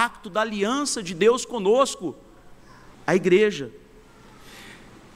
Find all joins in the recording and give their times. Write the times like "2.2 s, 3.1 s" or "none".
2.9 s